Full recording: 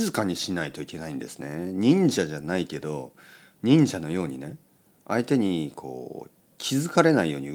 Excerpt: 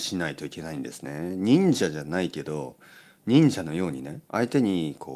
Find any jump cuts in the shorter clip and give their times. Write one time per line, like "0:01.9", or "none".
0:04.2